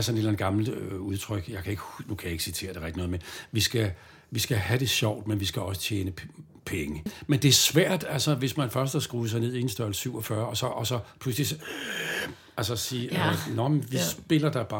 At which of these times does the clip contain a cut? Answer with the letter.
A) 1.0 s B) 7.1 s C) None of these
B